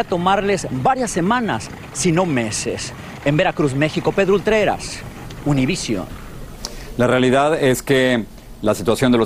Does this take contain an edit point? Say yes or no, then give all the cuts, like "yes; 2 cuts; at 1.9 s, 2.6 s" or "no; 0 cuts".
no; 0 cuts